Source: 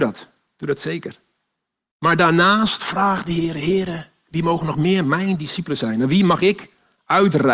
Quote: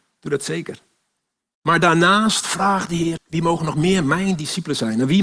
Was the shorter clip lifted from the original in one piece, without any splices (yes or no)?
no